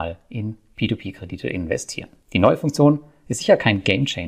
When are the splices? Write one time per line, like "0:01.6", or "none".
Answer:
0:02.2

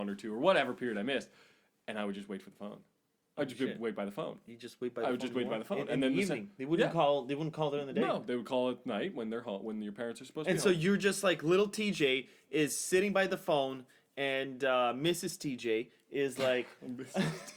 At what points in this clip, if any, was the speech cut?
none

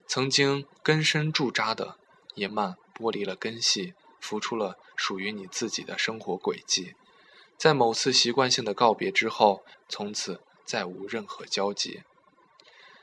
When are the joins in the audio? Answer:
0:02.5
0:09.7

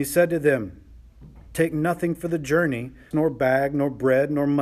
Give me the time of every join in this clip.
0:03.1

